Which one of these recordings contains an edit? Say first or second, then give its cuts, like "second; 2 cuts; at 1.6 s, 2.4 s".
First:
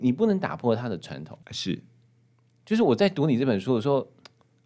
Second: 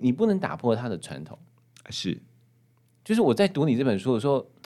first; 1 cut; at 1.4 s